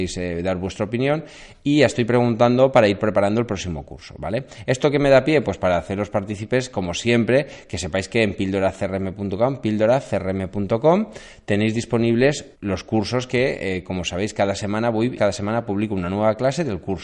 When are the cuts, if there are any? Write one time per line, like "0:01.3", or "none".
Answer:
0:12.5
0:15.2